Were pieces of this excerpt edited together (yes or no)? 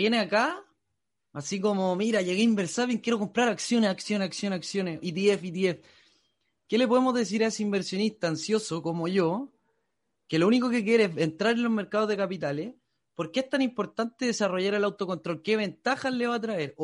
no